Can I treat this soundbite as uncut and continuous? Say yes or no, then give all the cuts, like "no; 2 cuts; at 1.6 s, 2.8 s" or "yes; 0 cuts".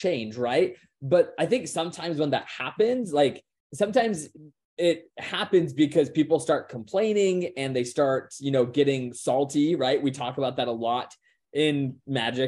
yes; 0 cuts